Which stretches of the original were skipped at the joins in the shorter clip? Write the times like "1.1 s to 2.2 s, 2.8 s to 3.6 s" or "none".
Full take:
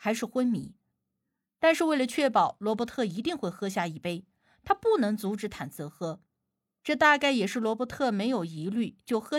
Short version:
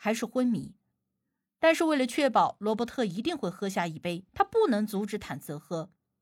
4.3 s to 4.6 s